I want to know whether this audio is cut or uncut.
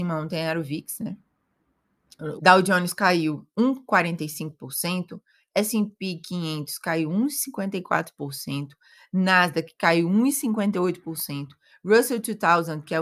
cut